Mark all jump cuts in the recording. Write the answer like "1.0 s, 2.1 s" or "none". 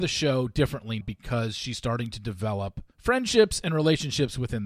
1.0 s, 2.9 s